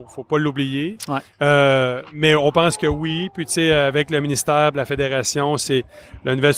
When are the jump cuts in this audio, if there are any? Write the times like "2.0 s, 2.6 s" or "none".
2.1 s